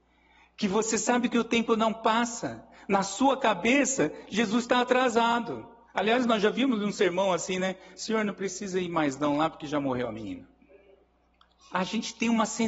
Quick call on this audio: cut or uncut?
uncut